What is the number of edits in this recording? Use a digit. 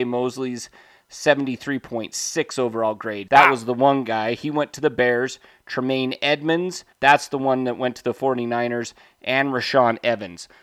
2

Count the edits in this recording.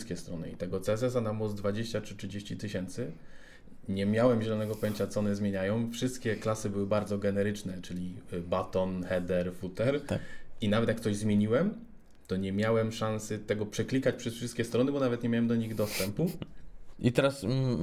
1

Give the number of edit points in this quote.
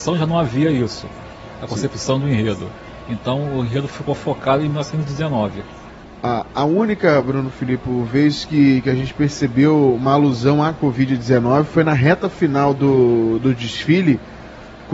0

